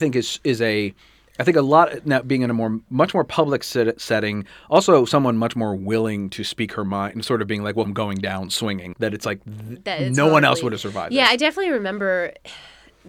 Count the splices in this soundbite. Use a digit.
2